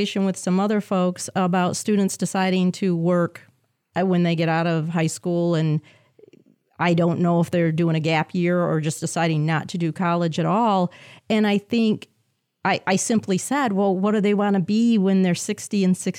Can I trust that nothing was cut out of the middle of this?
yes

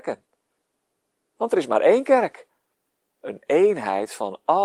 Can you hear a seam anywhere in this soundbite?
yes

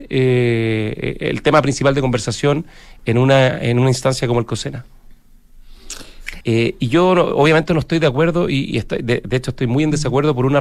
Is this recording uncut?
no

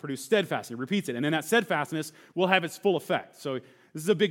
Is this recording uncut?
yes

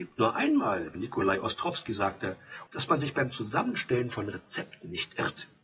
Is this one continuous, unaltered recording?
no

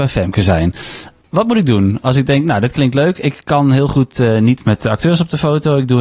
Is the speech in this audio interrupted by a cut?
no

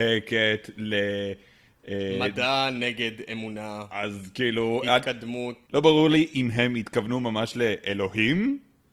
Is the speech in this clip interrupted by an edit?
yes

